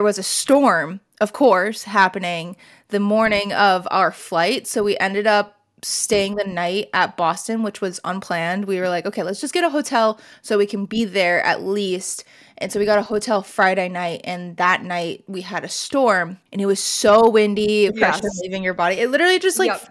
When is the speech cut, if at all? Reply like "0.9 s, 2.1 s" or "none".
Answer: 16.5 s, 17.9 s